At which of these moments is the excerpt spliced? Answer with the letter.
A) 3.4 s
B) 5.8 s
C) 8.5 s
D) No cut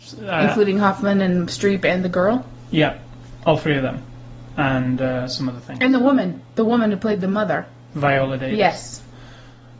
D